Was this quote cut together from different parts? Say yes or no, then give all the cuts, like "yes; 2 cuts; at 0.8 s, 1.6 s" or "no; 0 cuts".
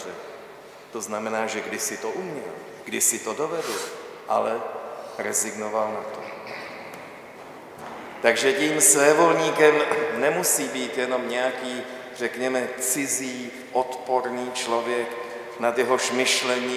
no; 0 cuts